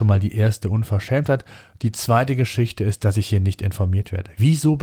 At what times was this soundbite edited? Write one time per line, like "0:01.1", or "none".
none

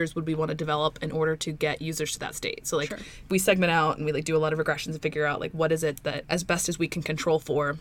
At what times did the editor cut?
none

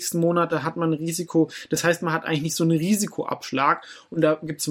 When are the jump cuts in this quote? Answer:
none

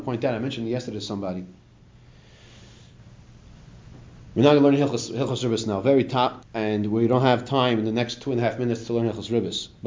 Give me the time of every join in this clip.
0:06.4

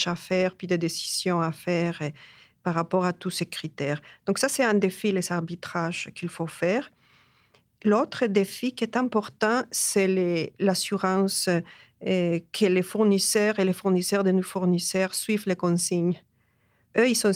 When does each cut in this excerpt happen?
none

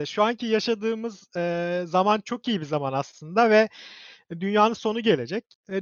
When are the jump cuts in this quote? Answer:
none

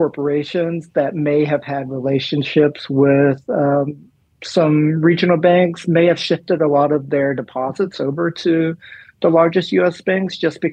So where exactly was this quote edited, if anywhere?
none

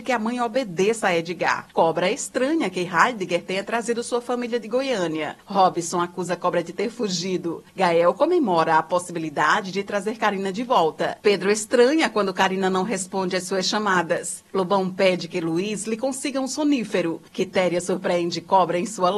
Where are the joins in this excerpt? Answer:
0:01.7
0:11.2
0:17.3

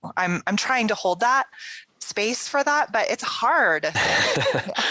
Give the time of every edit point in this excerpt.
0:03.9

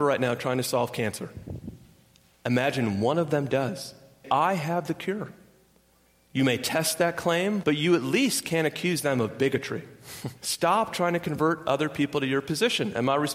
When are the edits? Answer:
0:04.2
0:07.6
0:10.4

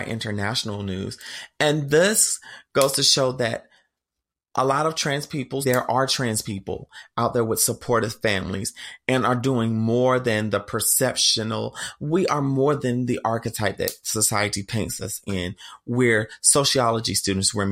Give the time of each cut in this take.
0:05.6

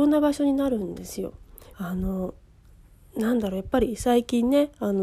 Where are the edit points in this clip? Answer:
0:01.7

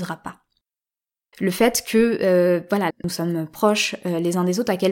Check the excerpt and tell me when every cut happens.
0:01.3
0:02.9

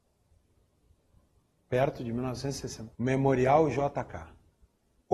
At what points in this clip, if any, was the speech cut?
0:03.0

